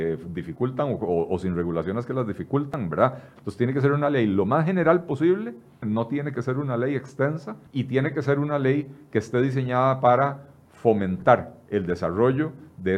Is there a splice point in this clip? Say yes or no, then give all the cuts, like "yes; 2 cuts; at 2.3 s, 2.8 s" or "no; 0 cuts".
yes; 3 cuts; at 3.4 s, 5.8 s, 7.7 s